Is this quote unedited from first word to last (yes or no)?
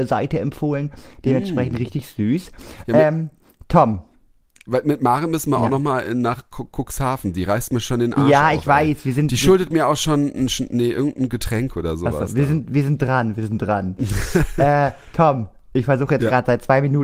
yes